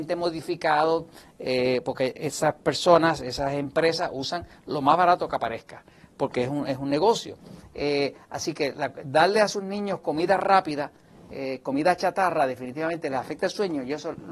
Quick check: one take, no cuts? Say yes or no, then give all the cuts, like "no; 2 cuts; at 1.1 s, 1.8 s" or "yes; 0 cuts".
yes; 0 cuts